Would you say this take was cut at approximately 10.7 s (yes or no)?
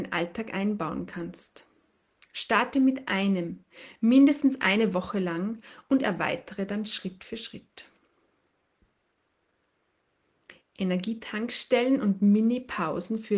no